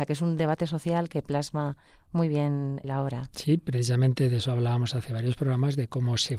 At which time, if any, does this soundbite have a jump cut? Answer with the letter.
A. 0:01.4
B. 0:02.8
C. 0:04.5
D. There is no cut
B